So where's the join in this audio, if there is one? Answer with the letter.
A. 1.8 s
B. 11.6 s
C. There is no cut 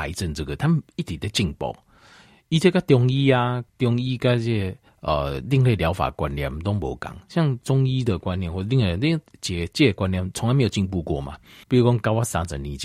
B